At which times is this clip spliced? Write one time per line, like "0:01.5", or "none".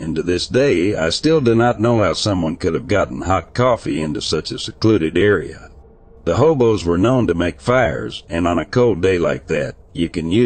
0:08.3